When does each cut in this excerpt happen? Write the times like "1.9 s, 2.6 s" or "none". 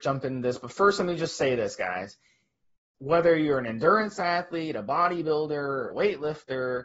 2.9 s, 5.9 s